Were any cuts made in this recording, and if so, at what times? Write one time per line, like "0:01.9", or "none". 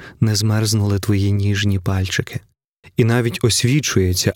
0:02.8